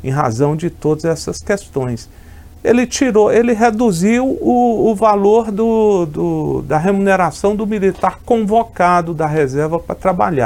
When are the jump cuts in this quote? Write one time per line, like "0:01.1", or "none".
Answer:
none